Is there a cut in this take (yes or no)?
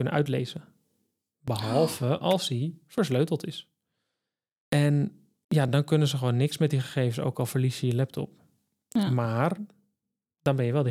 no